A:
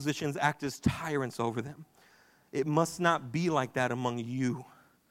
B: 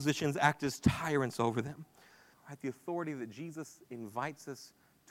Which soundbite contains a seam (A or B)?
B